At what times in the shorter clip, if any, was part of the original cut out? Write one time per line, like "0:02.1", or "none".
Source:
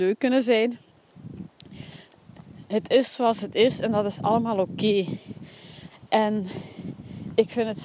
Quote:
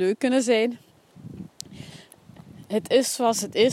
none